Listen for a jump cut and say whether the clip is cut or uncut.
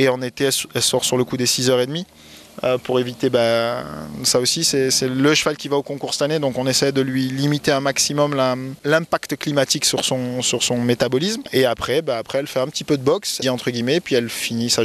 cut